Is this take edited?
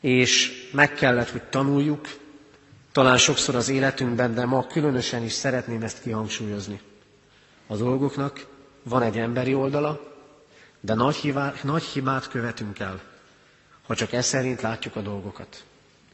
no; 0 cuts

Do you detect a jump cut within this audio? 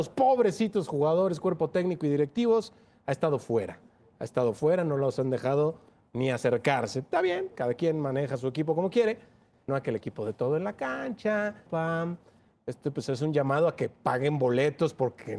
yes; 2 cuts; at 9.7 s, 11.7 s

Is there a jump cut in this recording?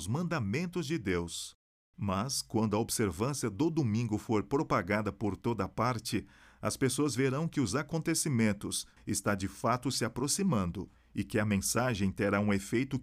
yes; 1 cut; at 9.0 s

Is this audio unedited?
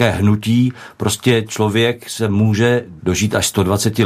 no; 1 cut; at 3.0 s

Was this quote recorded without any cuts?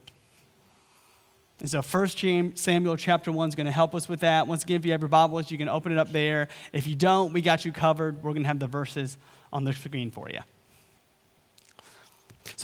yes; 0 cuts

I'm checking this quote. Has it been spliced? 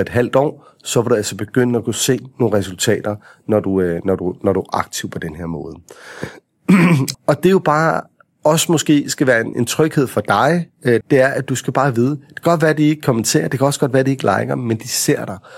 yes; 3 cuts; at 7.1 s, 9.5 s, 11.0 s

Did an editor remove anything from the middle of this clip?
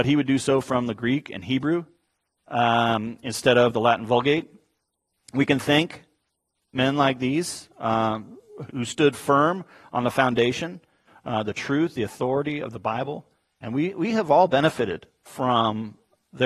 yes; 1 cut; at 8.7 s

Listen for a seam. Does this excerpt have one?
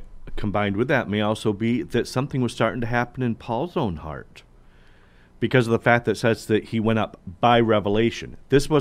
no; 0 cuts

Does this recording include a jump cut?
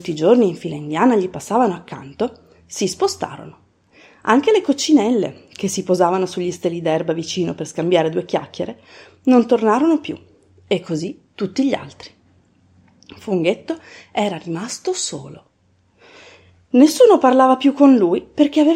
no; 0 cuts

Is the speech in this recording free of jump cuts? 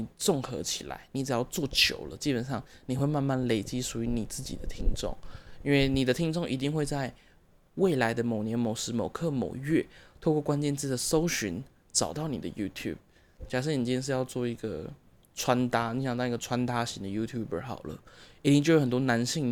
yes; 0 cuts

